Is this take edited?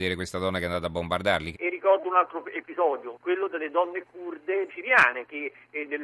yes; 3 cuts; at 1.5 s, 3.1 s, 4.7 s

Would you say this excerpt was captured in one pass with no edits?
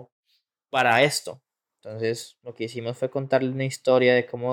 yes; 0 cuts

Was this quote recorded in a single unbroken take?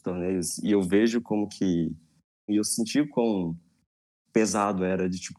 no; 1 cut; at 2.5 s

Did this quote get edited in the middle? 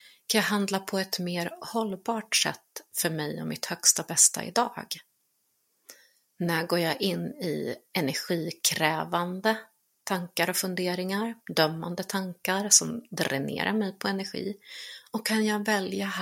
no; 0 cuts

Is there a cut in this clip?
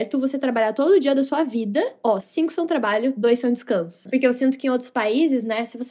yes; 2 cuts; at 2.2 s, 4.1 s

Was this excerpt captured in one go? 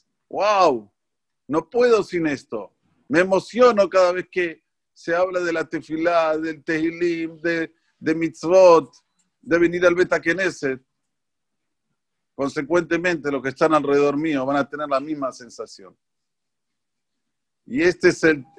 yes; 0 cuts

